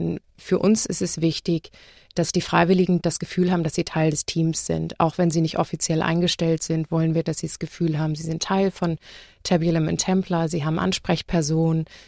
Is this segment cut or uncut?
cut